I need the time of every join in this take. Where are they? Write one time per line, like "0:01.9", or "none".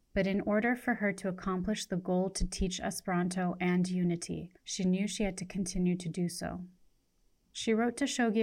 0:04.6